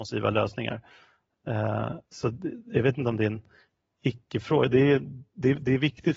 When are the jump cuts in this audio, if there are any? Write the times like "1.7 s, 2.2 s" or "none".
2.0 s